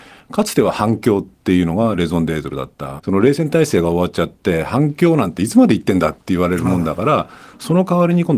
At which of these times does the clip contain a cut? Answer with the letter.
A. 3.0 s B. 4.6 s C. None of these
A